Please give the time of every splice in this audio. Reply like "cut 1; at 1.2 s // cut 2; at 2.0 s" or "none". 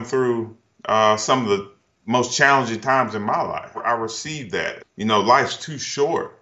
cut 1; at 4.8 s